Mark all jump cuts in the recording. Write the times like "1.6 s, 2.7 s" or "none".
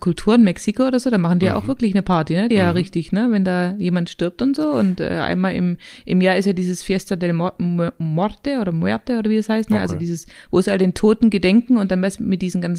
2.5 s